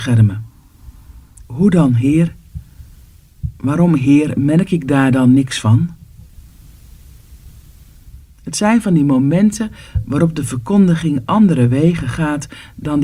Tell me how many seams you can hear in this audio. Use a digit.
2